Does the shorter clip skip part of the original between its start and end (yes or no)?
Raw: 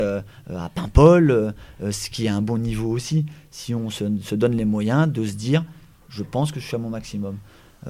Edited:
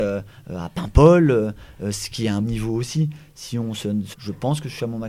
yes